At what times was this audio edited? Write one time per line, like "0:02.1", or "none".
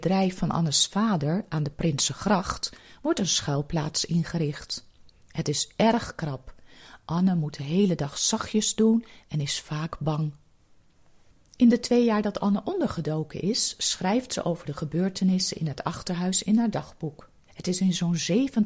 0:17.5